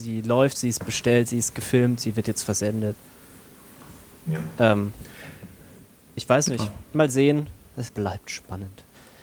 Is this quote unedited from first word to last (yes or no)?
no